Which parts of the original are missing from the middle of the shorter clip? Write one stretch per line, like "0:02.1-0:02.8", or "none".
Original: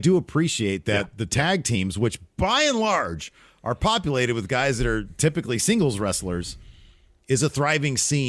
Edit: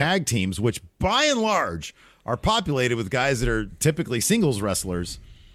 none